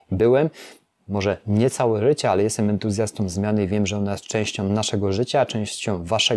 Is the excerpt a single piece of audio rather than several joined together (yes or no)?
yes